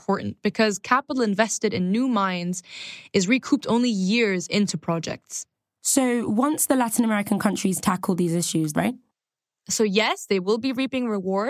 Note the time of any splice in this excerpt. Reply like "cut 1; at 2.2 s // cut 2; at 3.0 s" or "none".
cut 1; at 8.7 s